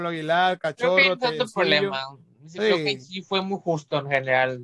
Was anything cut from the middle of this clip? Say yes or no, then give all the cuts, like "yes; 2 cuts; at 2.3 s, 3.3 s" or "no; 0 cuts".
no; 0 cuts